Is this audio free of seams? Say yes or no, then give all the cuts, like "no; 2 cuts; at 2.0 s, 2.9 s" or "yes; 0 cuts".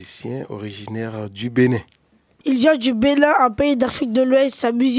no; 1 cut; at 2.4 s